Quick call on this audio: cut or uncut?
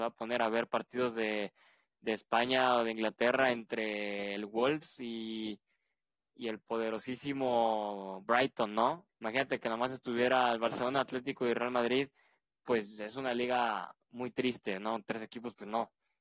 cut